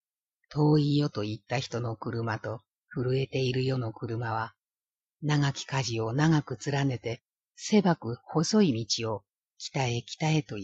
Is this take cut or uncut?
cut